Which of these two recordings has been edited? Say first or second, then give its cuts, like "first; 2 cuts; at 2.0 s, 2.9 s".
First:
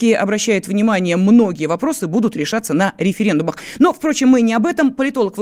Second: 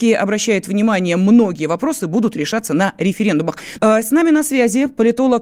second; 1 cut; at 3.8 s